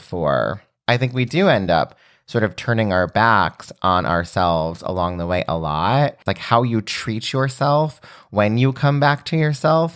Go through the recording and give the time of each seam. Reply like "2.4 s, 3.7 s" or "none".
6.3 s